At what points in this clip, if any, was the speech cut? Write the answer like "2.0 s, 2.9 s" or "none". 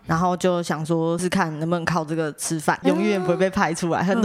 1.2 s, 2.8 s